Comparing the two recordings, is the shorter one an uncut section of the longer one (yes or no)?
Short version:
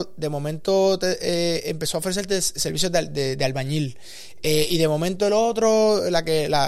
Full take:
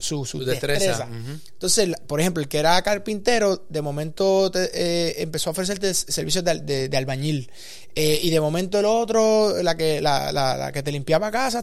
yes